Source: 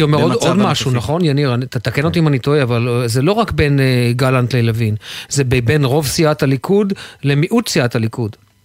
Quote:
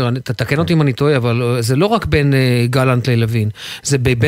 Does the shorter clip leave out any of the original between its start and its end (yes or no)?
no